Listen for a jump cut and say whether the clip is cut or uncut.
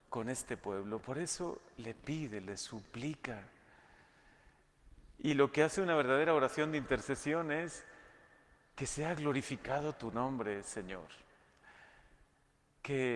uncut